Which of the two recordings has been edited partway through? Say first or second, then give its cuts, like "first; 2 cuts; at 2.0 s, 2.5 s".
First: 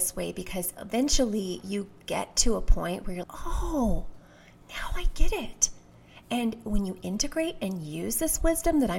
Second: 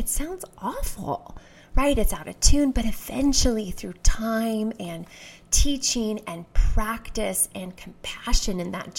first; 1 cut; at 3.2 s